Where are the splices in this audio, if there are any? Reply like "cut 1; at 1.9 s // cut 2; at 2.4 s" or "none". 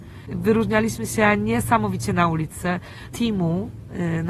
cut 1; at 3.1 s